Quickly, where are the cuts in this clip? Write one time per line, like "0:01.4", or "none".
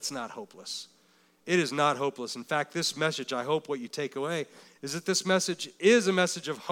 none